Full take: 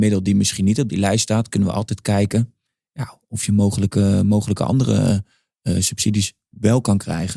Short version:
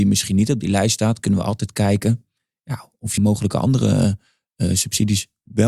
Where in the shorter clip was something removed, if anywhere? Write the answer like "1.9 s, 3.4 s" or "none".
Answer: 3.2 s